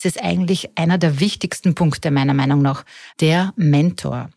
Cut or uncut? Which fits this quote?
cut